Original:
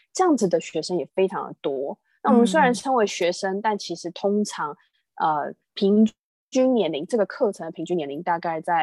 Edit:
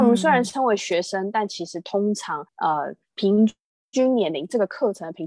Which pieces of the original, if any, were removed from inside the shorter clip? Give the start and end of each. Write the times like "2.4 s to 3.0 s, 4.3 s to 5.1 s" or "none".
4.8 s to 5.1 s